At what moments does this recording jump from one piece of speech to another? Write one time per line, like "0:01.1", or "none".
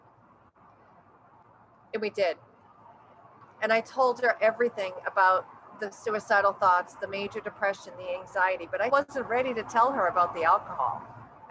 0:08.9